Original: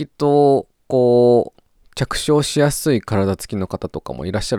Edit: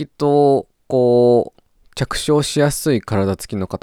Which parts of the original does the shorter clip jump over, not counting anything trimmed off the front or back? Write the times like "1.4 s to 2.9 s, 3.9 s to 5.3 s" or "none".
none